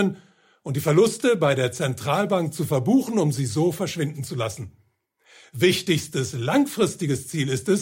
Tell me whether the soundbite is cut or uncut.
uncut